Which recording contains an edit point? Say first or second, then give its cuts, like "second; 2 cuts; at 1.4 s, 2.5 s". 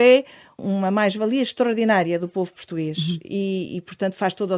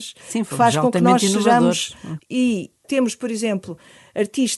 second; 1 cut; at 2.2 s